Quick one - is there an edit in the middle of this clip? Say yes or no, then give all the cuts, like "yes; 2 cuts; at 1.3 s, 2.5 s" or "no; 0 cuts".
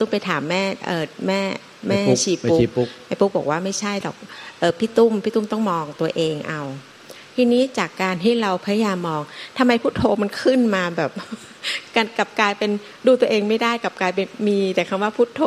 no; 0 cuts